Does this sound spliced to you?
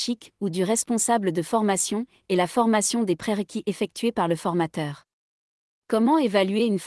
no; 0 cuts

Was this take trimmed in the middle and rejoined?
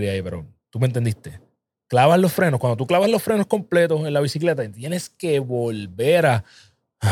no; 0 cuts

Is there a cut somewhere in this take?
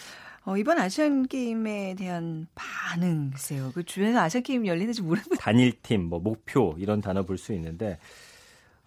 yes; 1 cut; at 5.4 s

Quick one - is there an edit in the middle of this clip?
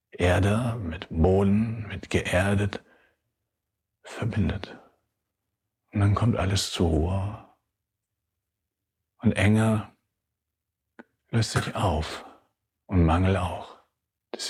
no; 0 cuts

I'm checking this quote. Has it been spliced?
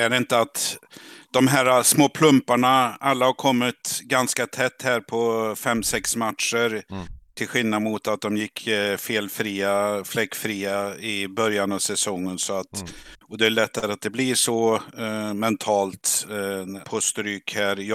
yes; 1 cut; at 16.8 s

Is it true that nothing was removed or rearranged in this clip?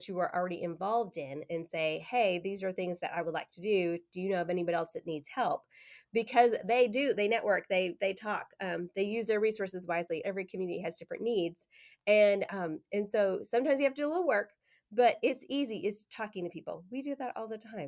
no; 1 cut; at 10.2 s

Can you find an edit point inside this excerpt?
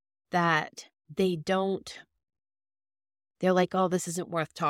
no; 0 cuts

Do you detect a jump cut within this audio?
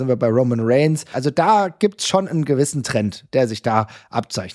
yes; 1 cut; at 1.1 s

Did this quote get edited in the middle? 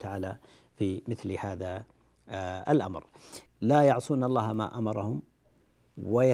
yes; 1 cut; at 3.5 s

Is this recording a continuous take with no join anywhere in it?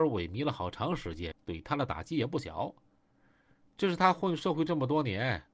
no; 1 cut; at 1.3 s

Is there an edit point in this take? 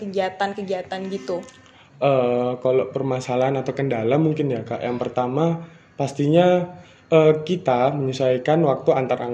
no; 0 cuts

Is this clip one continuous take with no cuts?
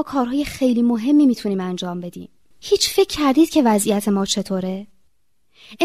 no; 1 cut; at 2.5 s

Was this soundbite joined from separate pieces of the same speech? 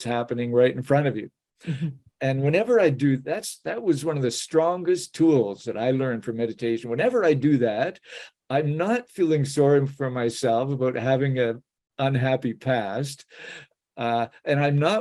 no; 0 cuts

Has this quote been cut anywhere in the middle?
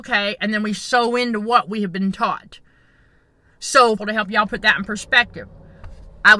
yes; 1 cut; at 4.0 s

